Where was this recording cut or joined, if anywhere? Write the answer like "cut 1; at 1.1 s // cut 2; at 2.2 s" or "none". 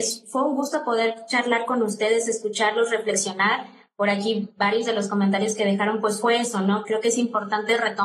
none